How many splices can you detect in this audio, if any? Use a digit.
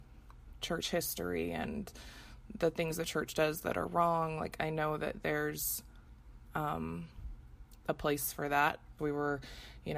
1